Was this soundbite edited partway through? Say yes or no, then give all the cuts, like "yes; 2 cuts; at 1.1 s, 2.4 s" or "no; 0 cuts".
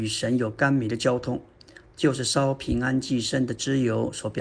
no; 0 cuts